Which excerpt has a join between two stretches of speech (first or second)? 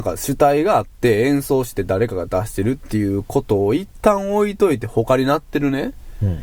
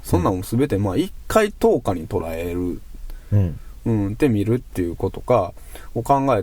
second